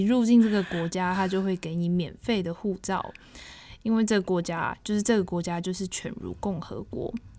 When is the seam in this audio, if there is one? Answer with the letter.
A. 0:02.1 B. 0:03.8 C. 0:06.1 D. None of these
D